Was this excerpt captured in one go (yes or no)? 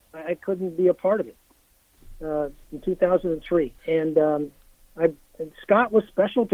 no